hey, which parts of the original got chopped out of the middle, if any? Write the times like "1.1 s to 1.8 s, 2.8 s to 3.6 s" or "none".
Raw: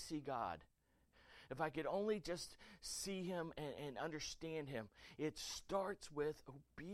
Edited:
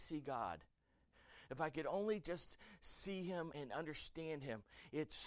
3.5 s to 3.8 s

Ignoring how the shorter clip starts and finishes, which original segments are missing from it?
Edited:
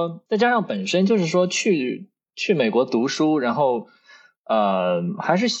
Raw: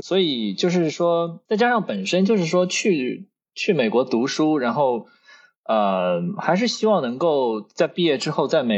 none

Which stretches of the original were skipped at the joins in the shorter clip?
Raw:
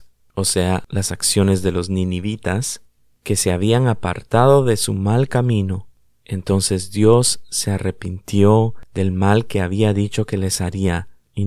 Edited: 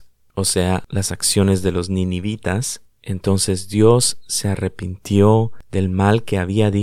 2.9 s to 6.1 s

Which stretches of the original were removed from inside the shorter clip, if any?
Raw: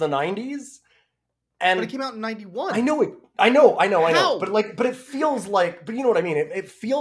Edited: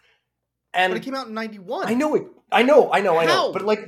none

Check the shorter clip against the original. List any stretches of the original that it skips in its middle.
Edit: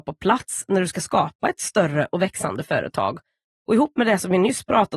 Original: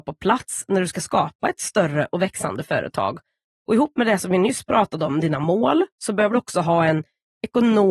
none

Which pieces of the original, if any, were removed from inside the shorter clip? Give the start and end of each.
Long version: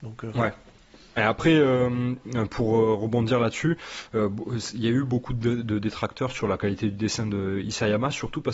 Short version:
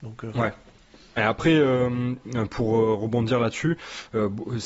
none

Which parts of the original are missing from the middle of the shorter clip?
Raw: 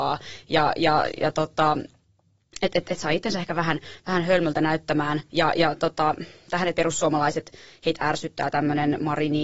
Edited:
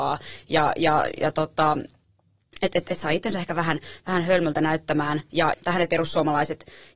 5.5 s to 6.4 s

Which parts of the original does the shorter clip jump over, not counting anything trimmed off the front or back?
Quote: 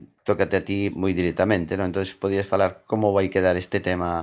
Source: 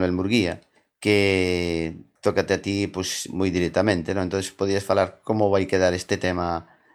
2.9 s to 3.3 s

